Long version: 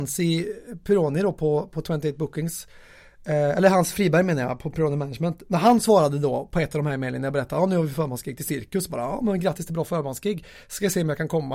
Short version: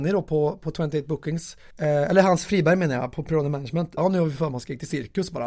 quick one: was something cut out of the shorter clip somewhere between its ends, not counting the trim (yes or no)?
yes